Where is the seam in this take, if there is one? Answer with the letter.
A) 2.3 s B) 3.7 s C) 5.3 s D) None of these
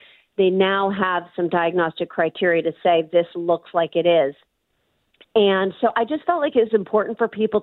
D